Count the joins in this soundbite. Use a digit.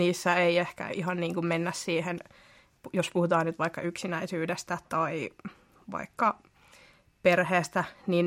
0